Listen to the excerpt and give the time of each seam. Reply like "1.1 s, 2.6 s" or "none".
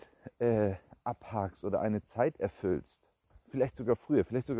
3.3 s